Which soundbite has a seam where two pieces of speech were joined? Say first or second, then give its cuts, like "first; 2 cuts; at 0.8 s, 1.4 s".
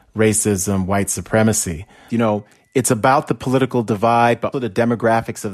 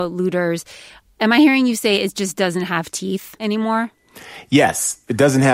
first; 2 cuts; at 2.1 s, 4.5 s